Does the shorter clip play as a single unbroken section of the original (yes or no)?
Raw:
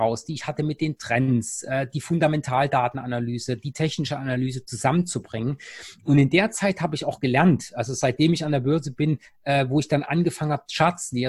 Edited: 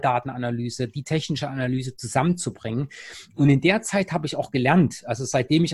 yes